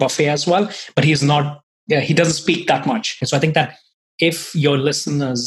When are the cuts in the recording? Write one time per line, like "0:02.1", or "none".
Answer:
0:03.2